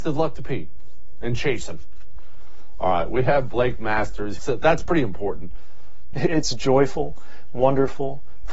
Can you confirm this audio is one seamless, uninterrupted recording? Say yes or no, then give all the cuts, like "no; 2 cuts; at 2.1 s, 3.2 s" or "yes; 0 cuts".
no; 2 cuts; at 4.4 s, 6.1 s